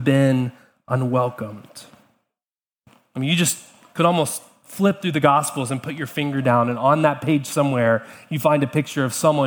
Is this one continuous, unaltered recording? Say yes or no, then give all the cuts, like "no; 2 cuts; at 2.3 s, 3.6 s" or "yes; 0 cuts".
yes; 0 cuts